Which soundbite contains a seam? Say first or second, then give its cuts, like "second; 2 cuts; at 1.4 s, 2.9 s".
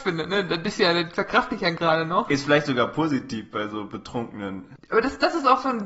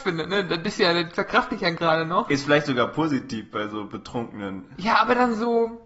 first; 1 cut; at 4.8 s